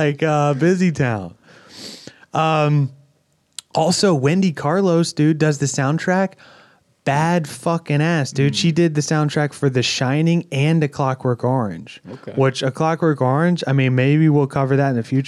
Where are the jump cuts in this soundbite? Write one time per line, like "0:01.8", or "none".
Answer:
none